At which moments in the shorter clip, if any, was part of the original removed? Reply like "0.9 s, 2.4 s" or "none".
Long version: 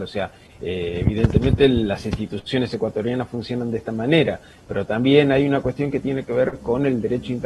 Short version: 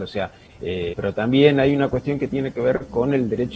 0.9 s